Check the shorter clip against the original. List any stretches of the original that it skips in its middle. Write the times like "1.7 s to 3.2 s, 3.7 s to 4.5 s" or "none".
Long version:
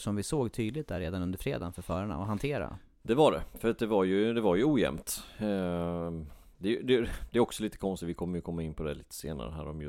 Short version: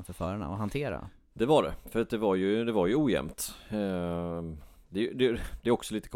none